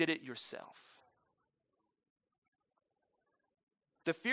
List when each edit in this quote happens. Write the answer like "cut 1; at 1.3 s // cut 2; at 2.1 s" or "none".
none